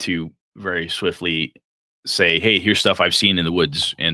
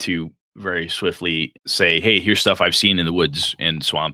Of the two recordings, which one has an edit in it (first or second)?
second